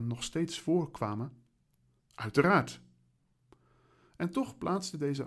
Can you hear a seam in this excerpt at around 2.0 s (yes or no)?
yes